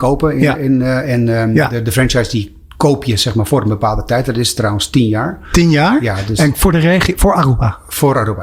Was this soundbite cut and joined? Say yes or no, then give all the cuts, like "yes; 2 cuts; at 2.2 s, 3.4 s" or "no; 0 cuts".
no; 0 cuts